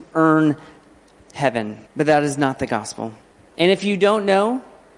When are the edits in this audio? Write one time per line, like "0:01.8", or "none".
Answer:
0:01.9
0:03.5